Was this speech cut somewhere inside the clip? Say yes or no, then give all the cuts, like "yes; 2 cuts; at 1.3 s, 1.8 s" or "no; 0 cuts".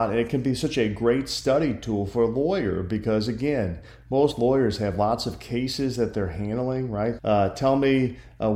yes; 1 cut; at 7.2 s